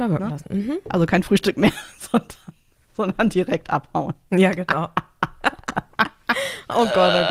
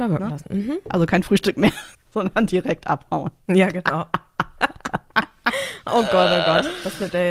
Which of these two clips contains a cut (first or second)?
second